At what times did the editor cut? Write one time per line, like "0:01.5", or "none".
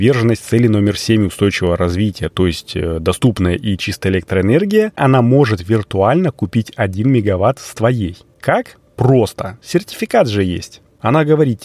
0:05.0